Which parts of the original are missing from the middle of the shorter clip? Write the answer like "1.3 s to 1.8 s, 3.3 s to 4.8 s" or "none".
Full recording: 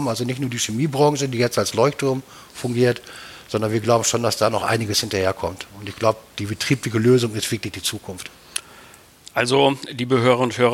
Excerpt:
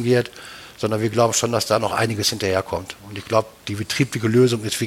none